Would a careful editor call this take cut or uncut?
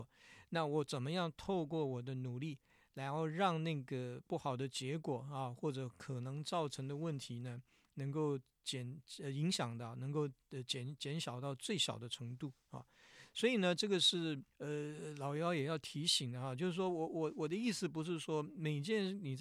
cut